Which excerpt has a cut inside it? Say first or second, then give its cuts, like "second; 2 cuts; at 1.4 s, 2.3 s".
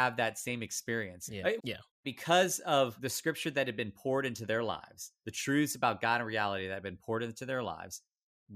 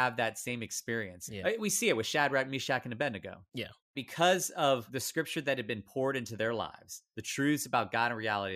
first; 1 cut; at 1.6 s